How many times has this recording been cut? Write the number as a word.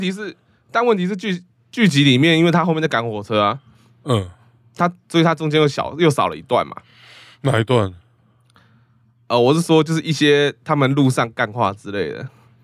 zero